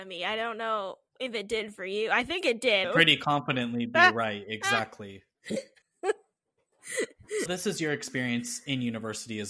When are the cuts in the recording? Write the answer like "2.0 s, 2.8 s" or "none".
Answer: 2.8 s, 5.8 s, 7.5 s